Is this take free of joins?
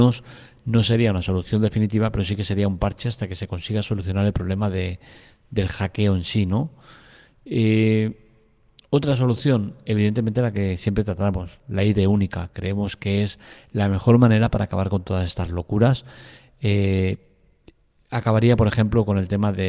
yes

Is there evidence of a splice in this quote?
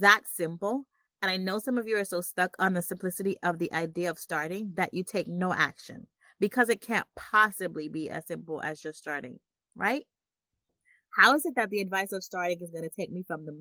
no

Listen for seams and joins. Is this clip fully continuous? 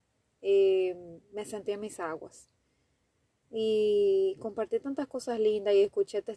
yes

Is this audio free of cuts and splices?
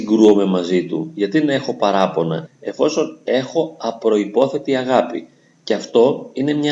no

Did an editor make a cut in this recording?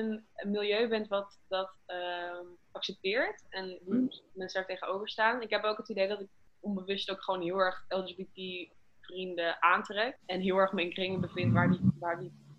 no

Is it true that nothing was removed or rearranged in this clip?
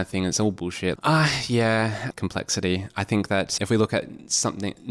no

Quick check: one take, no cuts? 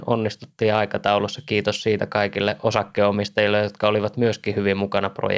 yes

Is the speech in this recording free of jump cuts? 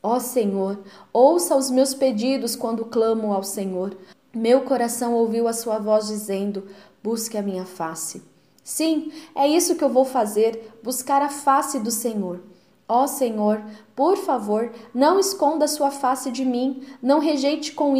no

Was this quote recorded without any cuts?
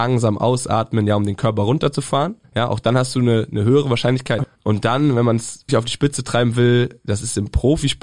no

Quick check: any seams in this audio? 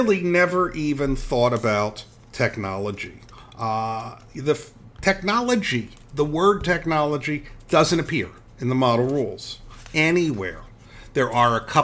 no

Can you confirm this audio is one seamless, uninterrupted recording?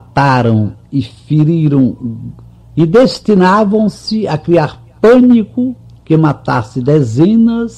no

